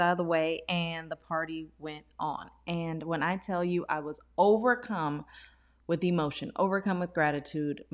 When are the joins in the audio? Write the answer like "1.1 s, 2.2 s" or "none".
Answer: none